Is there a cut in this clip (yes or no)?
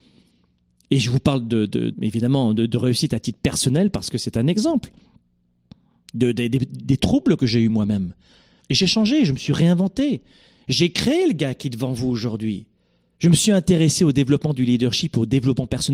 yes